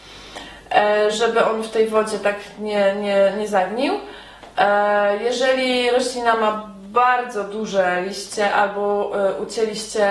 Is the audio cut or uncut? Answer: uncut